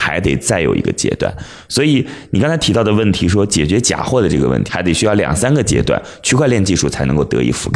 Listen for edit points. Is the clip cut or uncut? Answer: cut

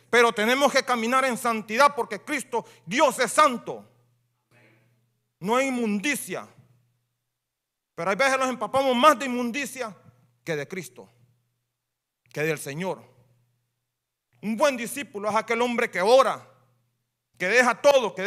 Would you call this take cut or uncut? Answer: uncut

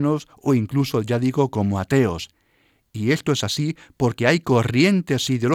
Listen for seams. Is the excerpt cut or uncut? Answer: uncut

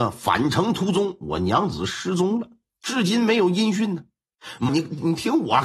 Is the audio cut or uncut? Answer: cut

